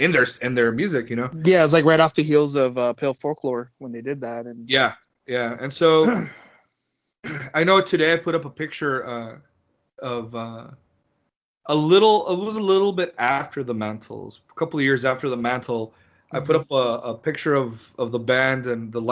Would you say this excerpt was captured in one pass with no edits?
yes; 0 cuts

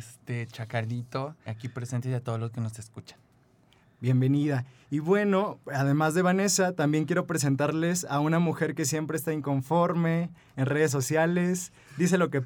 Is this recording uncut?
no; 1 cut; at 1.5 s

